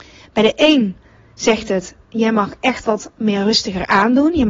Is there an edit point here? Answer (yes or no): no